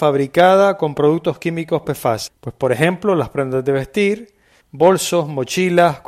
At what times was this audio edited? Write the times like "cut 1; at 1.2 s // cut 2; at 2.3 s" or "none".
cut 1; at 2.3 s // cut 2; at 4.6 s